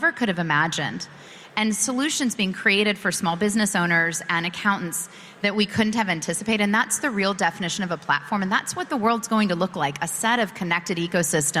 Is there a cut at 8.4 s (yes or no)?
no